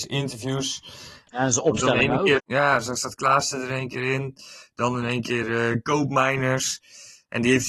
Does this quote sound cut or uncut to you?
cut